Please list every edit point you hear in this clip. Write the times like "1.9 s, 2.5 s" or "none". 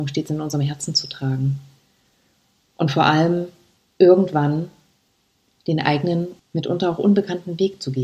3.9 s, 6.4 s